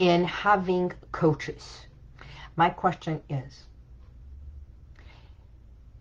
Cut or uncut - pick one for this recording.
cut